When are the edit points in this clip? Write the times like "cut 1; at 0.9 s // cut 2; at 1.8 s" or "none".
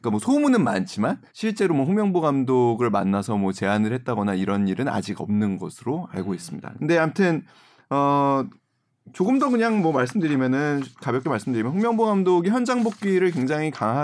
cut 1; at 1.3 s // cut 2; at 6.8 s

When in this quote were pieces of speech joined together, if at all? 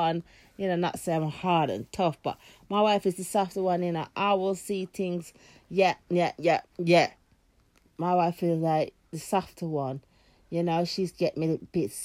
cut 1; at 6.7 s

